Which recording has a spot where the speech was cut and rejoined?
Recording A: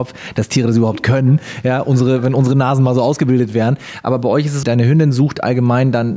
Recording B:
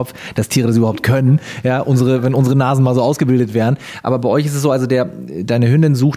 A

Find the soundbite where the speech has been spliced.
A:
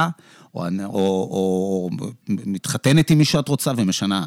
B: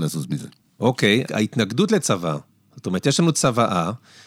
B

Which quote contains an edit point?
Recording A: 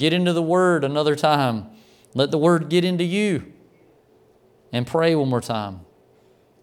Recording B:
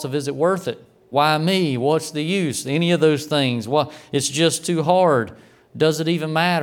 B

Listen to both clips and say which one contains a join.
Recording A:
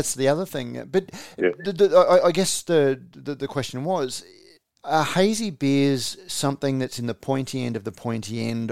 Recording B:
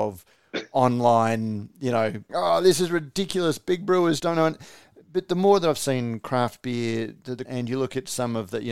B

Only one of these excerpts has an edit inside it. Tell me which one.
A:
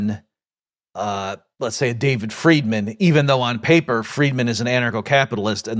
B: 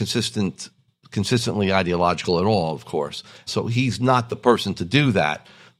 B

